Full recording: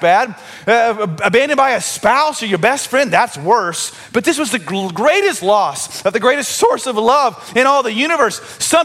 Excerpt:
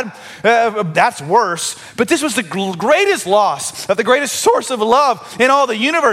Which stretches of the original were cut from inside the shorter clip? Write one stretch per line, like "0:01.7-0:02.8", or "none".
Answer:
0:01.2-0:03.1